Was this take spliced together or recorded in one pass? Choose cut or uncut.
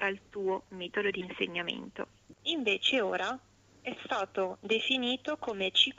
cut